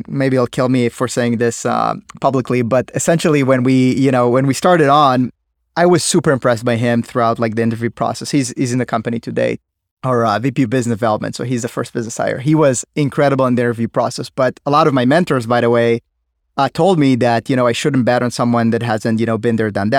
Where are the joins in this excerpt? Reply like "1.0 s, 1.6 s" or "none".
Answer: none